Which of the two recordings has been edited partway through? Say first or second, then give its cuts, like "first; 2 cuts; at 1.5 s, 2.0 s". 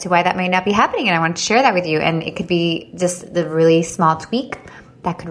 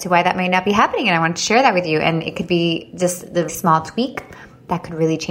second; 1 cut; at 3.5 s